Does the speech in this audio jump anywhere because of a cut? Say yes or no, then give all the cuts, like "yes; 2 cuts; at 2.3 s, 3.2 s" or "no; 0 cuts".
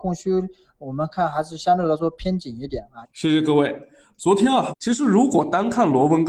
yes; 2 cuts; at 3.0 s, 4.7 s